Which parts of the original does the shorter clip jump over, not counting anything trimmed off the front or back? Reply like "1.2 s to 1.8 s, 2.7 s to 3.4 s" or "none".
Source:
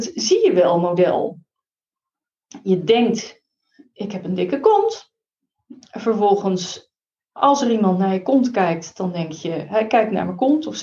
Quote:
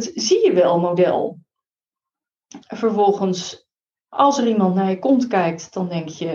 2.6 s to 5.9 s